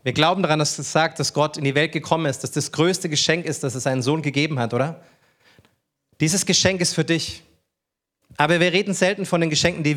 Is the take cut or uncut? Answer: uncut